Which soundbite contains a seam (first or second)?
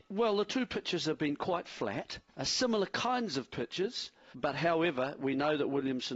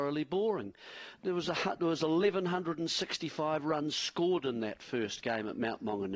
first